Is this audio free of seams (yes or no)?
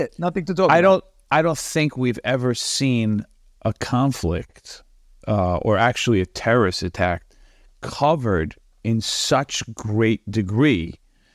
yes